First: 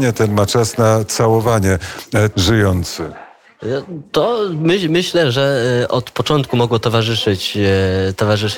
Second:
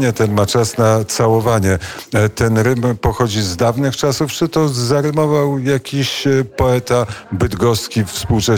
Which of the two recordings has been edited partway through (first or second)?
first